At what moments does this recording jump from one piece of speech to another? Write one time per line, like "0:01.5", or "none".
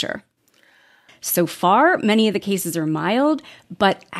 0:01.1